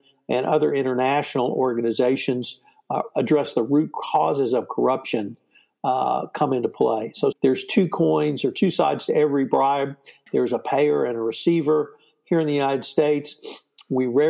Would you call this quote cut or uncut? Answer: cut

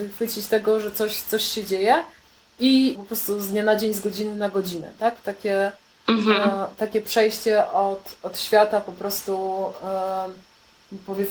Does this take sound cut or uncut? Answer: cut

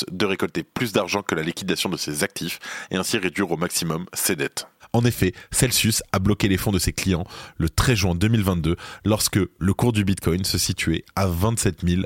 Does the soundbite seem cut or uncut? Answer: uncut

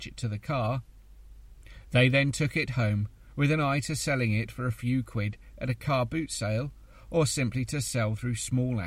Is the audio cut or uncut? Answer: uncut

